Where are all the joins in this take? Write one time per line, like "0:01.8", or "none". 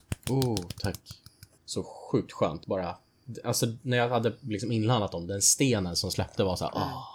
0:01.6
0:02.6